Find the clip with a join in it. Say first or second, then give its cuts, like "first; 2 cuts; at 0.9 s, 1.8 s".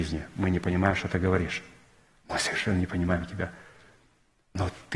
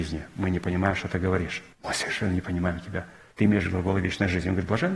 second; 2 cuts; at 1.7 s, 3.3 s